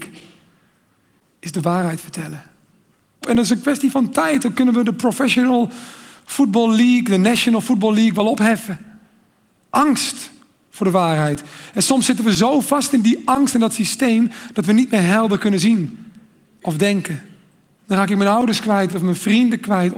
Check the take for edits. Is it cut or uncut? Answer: cut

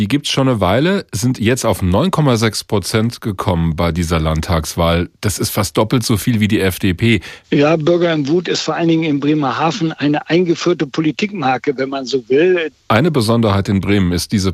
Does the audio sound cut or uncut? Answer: cut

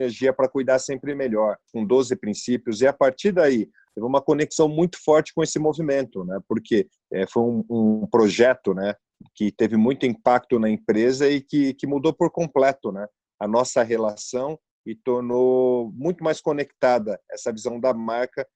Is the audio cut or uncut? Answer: uncut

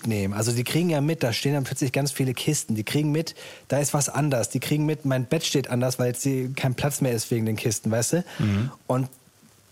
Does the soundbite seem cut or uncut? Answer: uncut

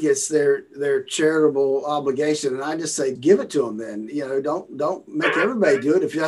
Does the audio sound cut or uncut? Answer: cut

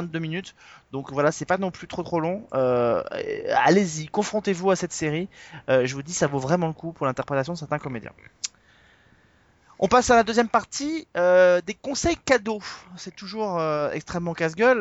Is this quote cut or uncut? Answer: uncut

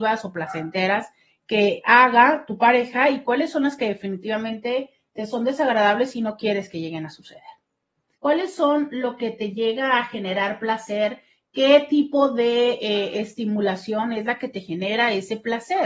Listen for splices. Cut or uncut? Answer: cut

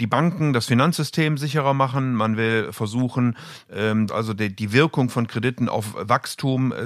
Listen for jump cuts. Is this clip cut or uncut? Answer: cut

